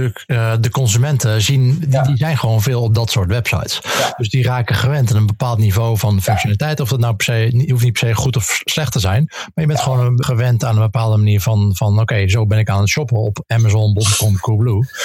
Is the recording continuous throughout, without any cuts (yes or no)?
no